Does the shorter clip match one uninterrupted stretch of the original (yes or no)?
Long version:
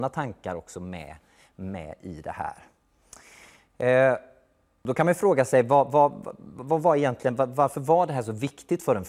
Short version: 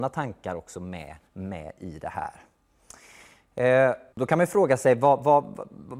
no